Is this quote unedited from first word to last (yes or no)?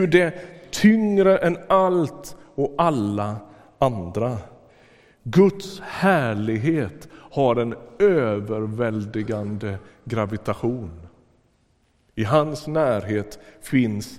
yes